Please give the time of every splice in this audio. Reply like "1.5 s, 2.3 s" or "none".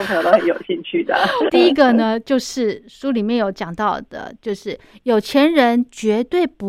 1.5 s